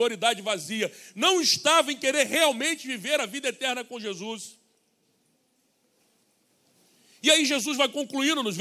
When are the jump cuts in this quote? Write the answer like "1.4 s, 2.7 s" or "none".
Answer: none